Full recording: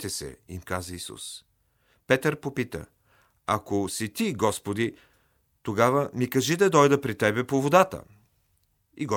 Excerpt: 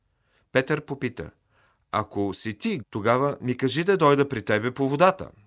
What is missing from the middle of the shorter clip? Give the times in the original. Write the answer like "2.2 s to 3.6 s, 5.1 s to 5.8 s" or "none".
4.3 s to 5.5 s